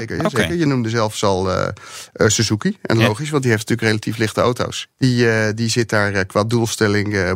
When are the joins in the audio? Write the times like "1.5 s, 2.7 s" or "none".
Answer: none

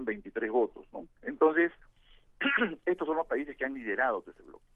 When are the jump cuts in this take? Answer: 1.2 s

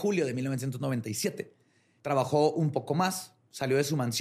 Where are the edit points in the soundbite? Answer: 2.0 s

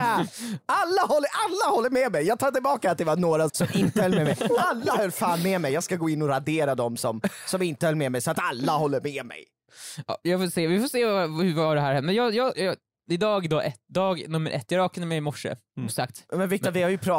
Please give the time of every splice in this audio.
3.5 s, 15.9 s

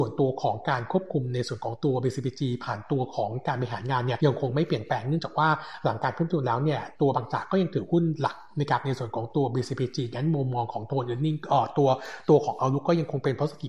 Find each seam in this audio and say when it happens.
4.2 s

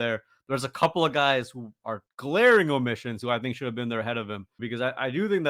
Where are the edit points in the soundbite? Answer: 4.6 s

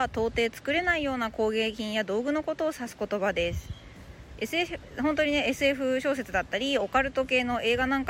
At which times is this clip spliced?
none

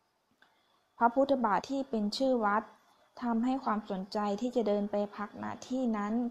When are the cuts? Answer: 1.6 s

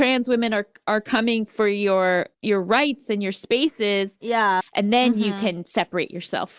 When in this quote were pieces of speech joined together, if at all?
2.3 s, 4.6 s

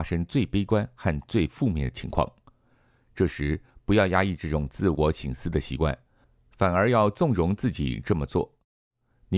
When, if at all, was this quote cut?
none

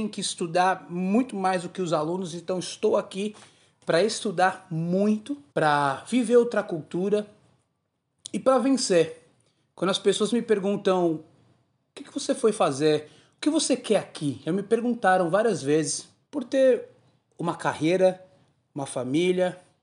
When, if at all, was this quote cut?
5.5 s, 16.2 s

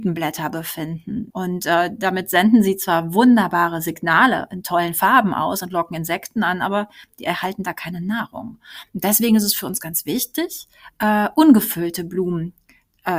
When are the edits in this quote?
1.3 s

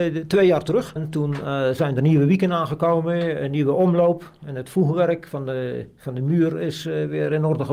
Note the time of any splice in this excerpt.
1.0 s

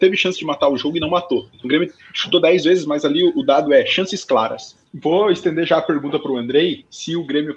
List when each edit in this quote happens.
1.6 s, 4.9 s

